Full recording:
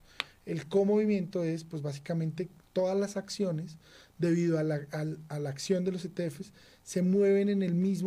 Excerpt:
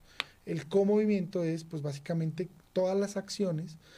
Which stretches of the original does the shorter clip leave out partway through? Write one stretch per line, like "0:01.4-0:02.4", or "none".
none